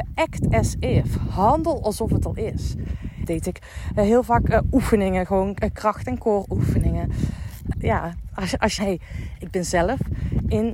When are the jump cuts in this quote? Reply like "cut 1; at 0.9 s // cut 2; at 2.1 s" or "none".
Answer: cut 1; at 3.2 s // cut 2; at 7.7 s // cut 3; at 8.8 s